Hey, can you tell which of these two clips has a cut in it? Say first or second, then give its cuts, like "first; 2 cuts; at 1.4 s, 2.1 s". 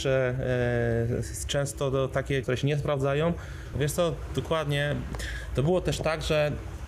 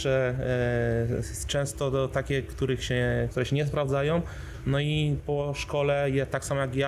first; 2 cuts; at 2.4 s, 3.7 s